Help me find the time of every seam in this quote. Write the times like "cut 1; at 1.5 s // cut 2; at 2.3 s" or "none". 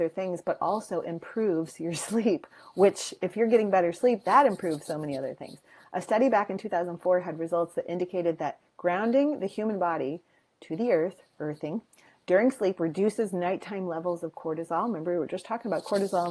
none